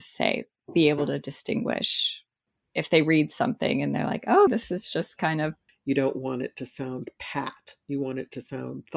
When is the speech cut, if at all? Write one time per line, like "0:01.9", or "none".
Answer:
0:04.5
0:05.7